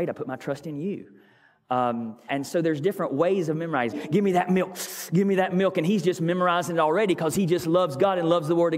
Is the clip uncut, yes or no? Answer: no